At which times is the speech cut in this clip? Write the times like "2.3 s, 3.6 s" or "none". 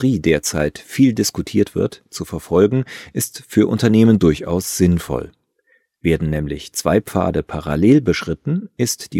none